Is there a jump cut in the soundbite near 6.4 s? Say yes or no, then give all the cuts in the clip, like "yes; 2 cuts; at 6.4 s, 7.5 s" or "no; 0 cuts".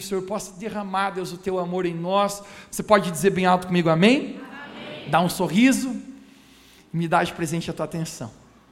no; 1 cut; at 2.7 s